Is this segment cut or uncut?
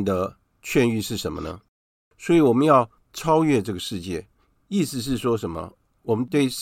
cut